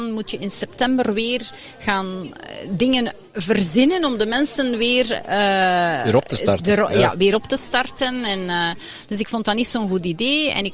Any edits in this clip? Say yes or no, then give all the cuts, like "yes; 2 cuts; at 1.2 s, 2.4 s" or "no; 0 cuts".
no; 0 cuts